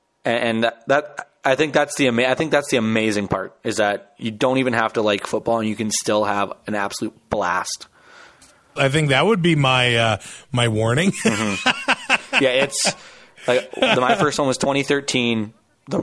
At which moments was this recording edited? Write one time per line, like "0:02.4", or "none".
0:08.8